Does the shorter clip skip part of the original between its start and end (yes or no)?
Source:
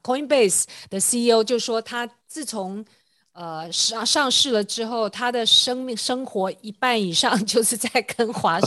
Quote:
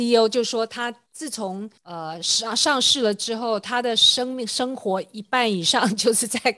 yes